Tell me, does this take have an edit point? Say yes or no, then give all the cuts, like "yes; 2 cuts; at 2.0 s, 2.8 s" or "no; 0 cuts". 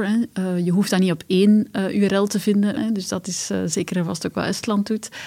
yes; 1 cut; at 2.8 s